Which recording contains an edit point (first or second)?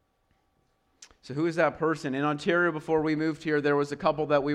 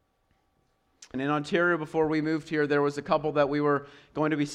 second